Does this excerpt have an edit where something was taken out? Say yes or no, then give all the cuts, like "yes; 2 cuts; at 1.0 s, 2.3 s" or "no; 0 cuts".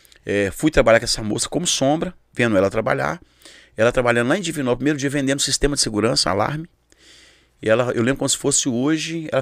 no; 0 cuts